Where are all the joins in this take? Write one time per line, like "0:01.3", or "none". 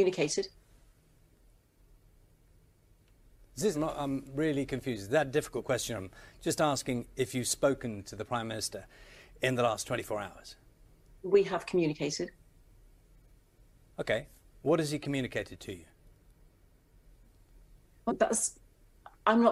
0:03.7
0:18.1